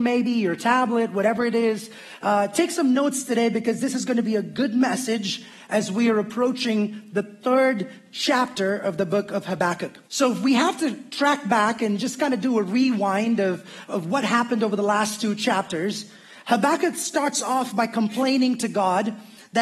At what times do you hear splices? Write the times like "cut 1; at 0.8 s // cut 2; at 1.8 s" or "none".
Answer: cut 1; at 10.0 s // cut 2; at 13.9 s